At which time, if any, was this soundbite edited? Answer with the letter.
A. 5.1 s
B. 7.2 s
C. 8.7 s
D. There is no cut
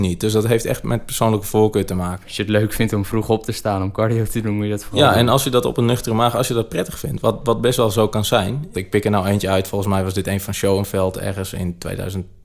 C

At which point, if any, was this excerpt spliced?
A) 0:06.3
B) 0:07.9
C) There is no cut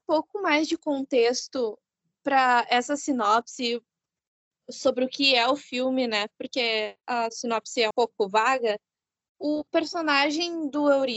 B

